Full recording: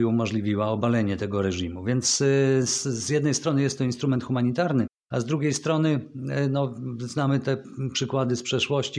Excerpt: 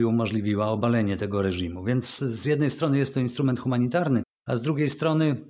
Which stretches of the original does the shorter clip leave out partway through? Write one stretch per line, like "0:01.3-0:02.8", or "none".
0:02.2-0:02.8